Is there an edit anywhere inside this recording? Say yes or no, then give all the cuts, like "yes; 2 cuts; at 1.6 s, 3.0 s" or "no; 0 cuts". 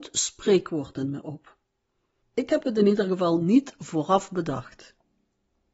yes; 1 cut; at 2.2 s